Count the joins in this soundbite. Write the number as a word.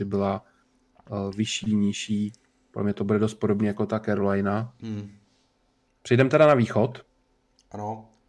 one